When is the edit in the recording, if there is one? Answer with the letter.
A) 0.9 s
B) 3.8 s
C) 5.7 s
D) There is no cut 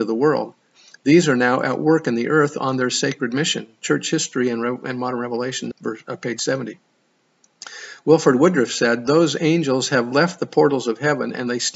C